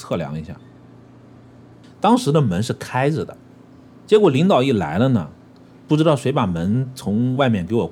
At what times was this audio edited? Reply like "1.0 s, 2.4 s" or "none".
1.8 s